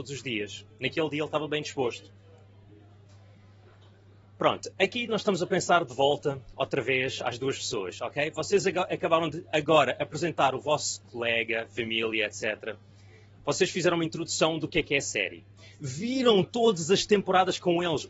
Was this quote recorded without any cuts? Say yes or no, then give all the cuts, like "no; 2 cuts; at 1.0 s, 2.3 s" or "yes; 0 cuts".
yes; 0 cuts